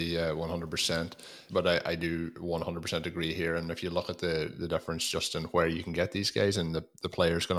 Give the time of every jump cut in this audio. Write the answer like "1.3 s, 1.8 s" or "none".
1.5 s